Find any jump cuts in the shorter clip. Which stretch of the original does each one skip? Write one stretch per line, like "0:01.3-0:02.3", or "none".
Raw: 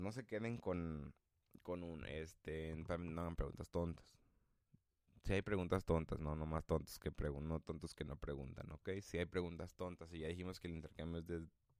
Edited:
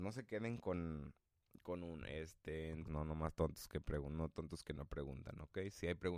0:02.9-0:06.2